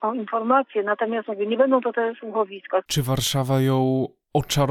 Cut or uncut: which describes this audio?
uncut